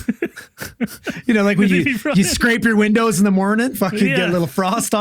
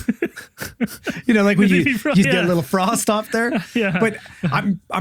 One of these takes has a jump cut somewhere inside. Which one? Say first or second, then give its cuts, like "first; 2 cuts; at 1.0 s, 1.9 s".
second; 1 cut; at 2.2 s